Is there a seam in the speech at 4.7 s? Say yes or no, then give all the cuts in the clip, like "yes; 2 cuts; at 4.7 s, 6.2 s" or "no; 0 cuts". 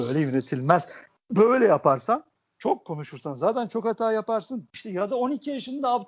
yes; 1 cut; at 4.7 s